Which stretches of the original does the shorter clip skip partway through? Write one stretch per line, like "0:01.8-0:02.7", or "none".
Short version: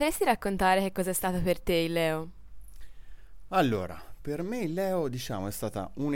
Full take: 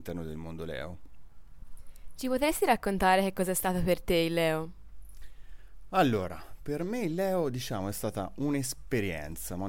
none